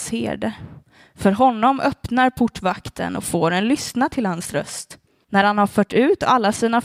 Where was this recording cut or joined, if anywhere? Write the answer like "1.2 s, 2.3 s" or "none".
5.2 s